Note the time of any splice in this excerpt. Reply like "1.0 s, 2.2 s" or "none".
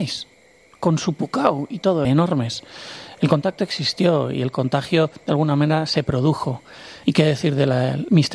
2.0 s, 7.0 s